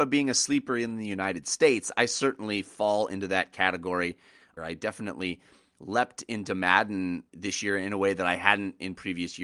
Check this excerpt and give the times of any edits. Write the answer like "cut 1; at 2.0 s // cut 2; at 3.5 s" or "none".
cut 1; at 4.6 s // cut 2; at 7.3 s